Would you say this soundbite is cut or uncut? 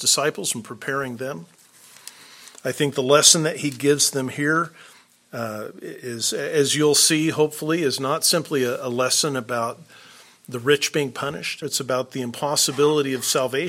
cut